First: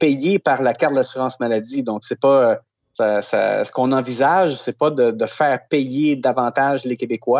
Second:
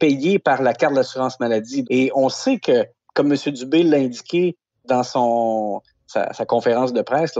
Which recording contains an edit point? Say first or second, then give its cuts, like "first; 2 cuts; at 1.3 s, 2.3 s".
second; 1 cut; at 1.8 s